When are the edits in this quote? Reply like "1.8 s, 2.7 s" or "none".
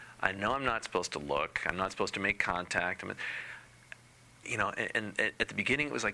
4.4 s